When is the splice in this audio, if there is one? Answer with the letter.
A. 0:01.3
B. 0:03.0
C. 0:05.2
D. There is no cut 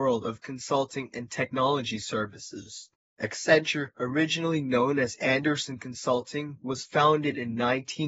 B